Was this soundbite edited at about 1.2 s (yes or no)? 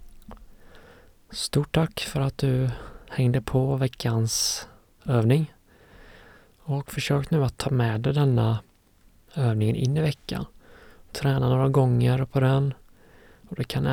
no